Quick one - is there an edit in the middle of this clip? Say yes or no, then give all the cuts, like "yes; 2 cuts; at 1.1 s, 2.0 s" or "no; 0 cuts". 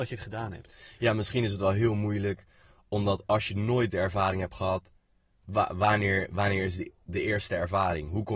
no; 0 cuts